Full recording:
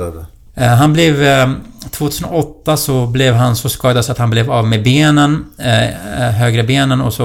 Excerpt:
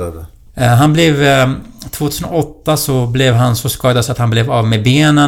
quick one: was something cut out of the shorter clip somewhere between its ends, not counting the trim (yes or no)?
no